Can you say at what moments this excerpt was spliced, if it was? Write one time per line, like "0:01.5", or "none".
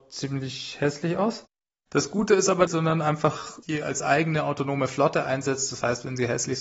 0:02.7